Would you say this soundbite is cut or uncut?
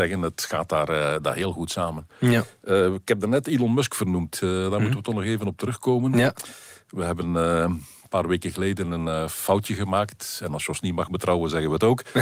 uncut